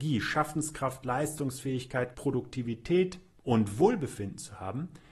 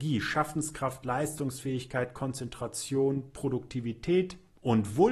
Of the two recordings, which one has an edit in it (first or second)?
first